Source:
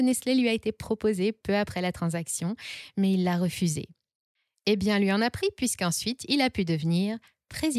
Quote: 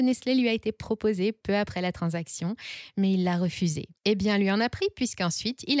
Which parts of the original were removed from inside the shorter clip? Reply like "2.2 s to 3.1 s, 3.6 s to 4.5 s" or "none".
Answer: 4.0 s to 4.6 s